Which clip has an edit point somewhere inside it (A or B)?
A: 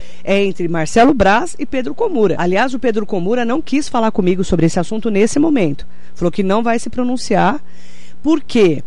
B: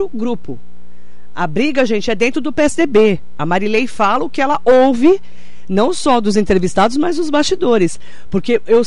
A